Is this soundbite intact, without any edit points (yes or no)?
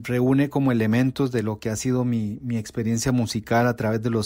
yes